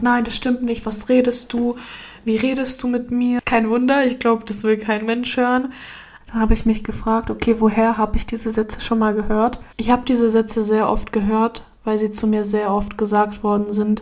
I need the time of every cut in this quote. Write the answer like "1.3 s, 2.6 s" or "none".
3.4 s, 6.2 s, 9.7 s